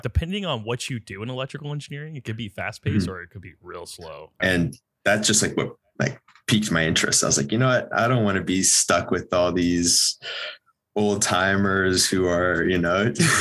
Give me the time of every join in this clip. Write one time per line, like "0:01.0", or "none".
0:04.4